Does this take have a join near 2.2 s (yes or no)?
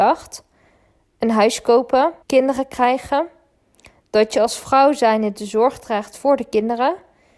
yes